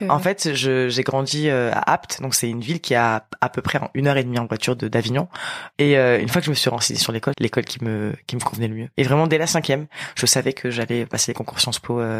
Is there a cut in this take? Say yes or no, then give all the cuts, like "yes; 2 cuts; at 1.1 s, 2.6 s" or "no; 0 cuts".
yes; 2 cuts; at 5.7 s, 7.3 s